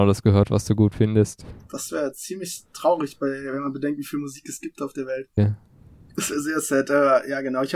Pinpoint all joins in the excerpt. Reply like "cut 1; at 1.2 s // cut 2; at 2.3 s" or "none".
cut 1; at 5.4 s